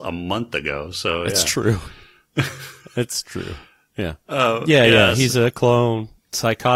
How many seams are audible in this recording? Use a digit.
0